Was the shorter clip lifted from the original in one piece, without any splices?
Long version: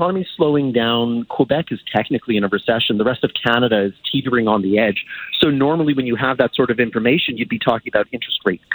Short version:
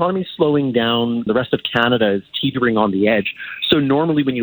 no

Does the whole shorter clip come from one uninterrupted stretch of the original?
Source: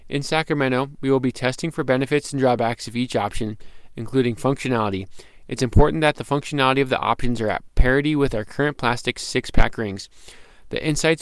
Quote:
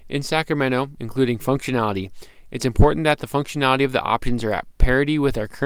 no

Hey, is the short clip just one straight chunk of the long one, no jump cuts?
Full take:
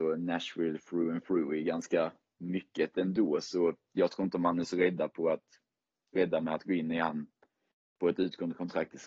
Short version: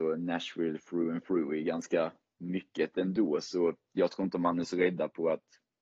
yes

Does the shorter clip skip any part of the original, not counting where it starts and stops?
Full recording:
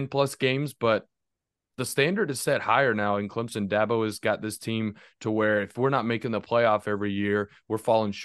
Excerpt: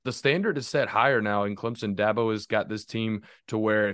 no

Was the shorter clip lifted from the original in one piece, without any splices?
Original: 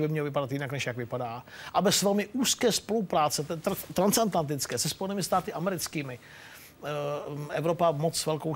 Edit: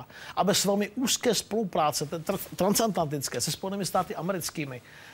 yes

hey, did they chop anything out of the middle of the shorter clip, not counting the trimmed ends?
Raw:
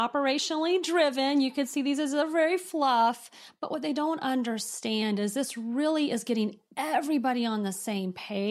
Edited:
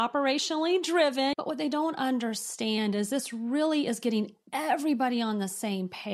yes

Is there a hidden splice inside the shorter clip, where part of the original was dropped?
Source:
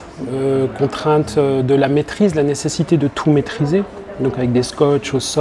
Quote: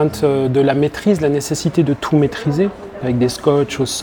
yes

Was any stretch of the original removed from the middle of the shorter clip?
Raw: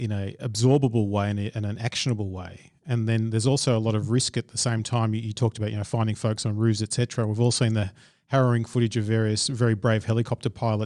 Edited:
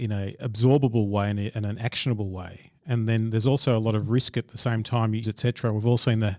yes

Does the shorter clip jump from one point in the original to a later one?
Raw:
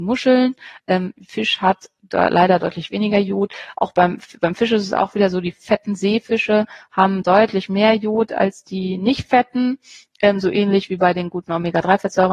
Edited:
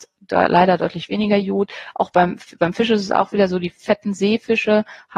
no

